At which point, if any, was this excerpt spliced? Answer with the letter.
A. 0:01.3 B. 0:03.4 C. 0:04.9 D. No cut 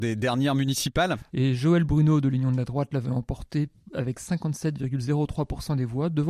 A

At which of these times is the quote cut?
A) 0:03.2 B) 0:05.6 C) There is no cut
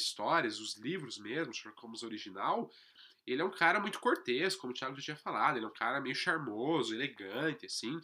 C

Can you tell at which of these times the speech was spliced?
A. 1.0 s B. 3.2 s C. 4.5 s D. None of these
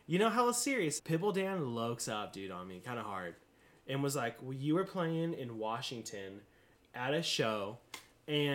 A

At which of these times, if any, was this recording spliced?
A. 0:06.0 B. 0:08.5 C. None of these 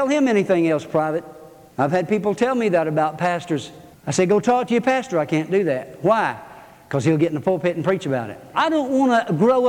B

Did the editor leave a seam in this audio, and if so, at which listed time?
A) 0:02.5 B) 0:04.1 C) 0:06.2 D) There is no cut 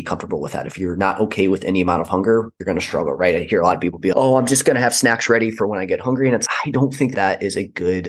B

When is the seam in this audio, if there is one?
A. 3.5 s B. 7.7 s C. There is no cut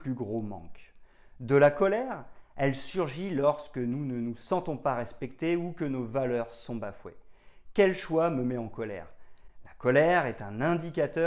C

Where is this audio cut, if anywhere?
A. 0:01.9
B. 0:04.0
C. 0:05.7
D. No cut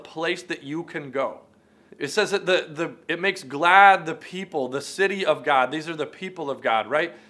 A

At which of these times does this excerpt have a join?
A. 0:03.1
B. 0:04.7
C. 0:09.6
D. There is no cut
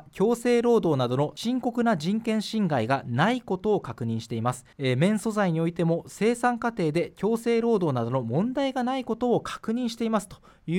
B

